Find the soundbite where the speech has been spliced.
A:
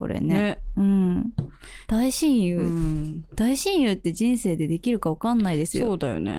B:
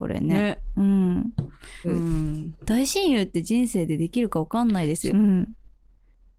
B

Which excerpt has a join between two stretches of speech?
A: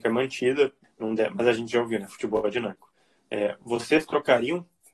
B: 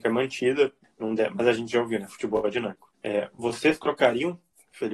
B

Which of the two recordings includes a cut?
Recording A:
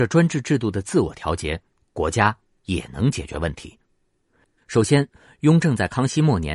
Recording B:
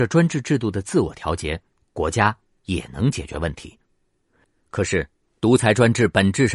A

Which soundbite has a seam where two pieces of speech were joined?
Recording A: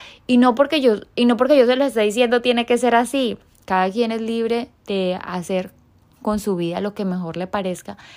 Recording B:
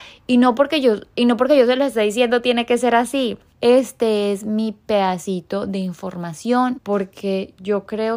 B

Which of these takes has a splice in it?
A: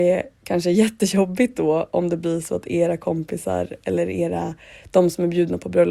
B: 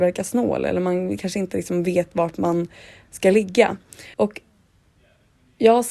B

